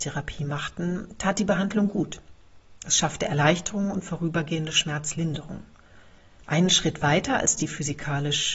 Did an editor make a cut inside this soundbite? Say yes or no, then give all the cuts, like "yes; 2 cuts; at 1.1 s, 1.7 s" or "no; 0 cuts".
yes; 1 cut; at 6.4 s